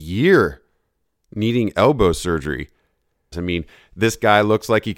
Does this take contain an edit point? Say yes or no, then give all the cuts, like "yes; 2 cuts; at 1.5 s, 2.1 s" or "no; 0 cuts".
yes; 1 cut; at 3.3 s